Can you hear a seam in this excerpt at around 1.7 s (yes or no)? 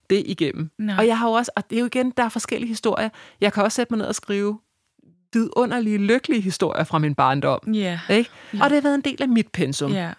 yes